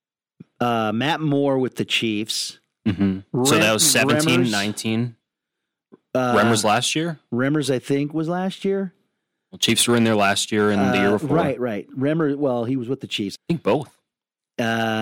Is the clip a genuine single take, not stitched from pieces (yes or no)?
no